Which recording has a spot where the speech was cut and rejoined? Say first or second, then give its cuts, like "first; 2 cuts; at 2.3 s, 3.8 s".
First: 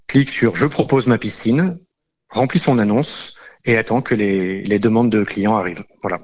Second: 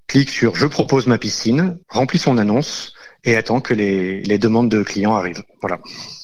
second; 1 cut; at 1.8 s